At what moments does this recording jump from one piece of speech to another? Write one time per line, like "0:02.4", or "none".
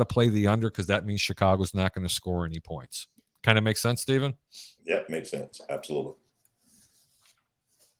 none